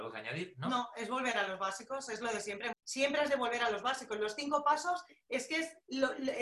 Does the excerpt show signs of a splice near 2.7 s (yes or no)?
yes